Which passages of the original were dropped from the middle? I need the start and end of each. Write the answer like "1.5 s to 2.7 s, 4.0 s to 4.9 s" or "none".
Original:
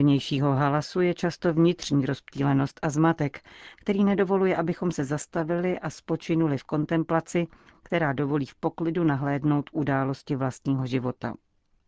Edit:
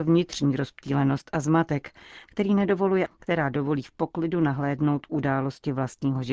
4.6 s to 7.7 s